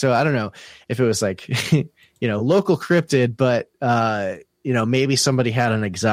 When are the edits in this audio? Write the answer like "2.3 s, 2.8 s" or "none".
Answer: none

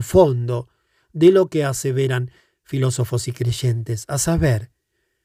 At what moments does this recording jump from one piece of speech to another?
none

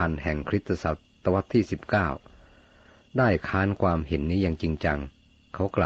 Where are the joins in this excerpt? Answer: none

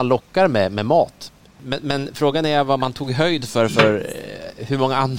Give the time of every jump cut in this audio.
none

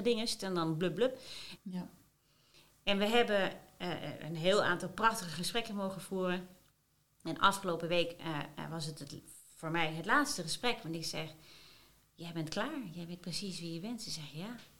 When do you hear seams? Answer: 1.6 s, 9.5 s

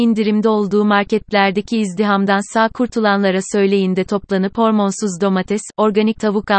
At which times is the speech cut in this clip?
none

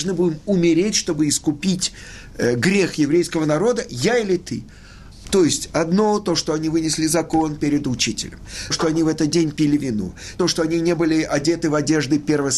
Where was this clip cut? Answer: 5.2 s, 8.7 s, 10.4 s

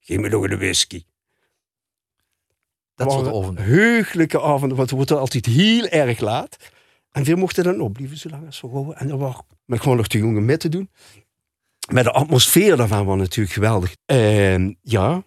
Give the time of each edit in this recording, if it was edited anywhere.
9.6 s, 14.0 s

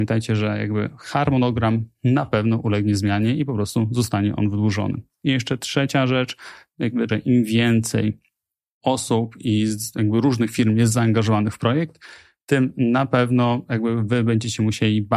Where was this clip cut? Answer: 7.1 s

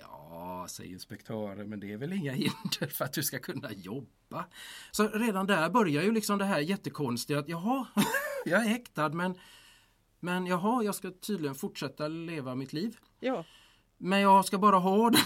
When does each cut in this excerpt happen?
4.9 s, 13.2 s

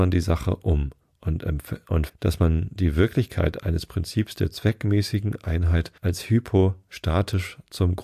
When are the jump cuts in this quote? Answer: 2.1 s, 6.0 s

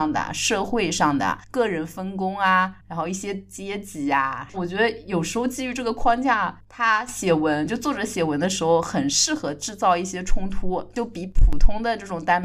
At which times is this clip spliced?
4.5 s

